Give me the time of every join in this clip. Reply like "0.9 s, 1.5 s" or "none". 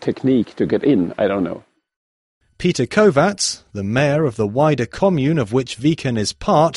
2.5 s